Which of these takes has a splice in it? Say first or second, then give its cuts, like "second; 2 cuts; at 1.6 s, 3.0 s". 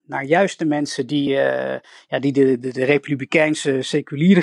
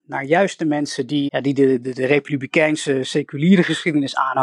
second; 1 cut; at 1.3 s